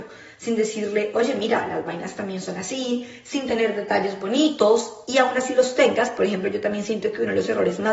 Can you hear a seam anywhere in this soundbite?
no; 0 cuts

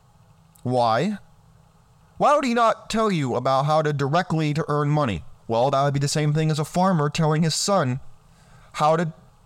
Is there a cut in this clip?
yes; 1 cut; at 5.4 s

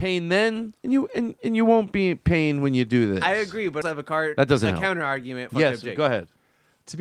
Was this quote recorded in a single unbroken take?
no; 2 cuts; at 3.8 s, 5.5 s

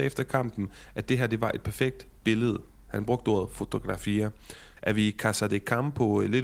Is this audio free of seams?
no; 1 cut; at 4.8 s

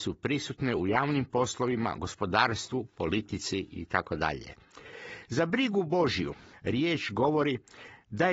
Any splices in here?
no; 0 cuts

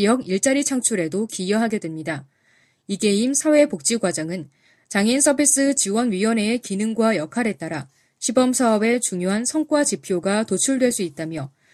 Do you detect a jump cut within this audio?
no; 0 cuts

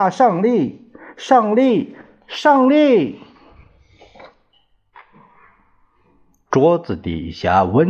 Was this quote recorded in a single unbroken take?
yes; 0 cuts

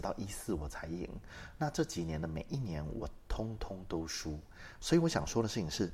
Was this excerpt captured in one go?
yes; 0 cuts

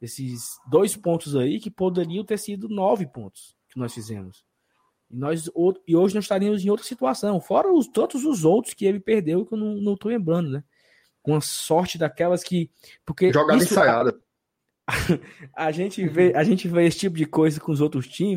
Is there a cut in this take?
yes; 1 cut; at 11.2 s

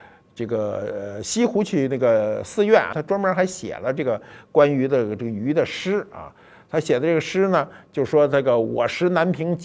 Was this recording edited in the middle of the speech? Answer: no; 0 cuts

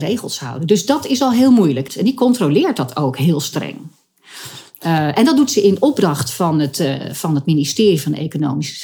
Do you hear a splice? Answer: yes; 1 cut; at 1.9 s

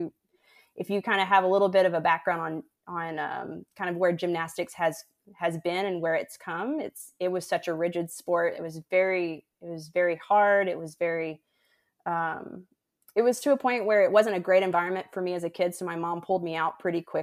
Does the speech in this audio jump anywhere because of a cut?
no; 0 cuts

